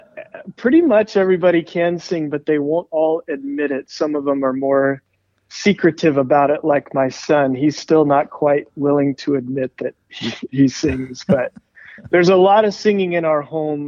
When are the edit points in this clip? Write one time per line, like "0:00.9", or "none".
none